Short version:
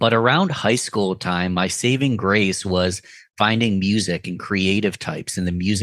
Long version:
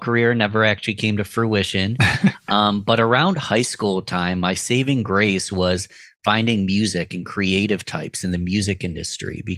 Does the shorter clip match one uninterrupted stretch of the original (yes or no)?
yes